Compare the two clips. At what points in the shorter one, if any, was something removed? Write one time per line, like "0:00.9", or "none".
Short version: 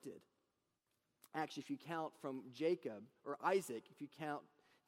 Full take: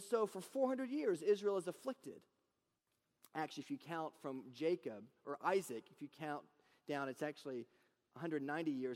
none